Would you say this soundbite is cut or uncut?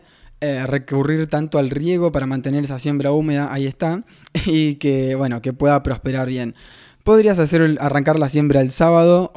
uncut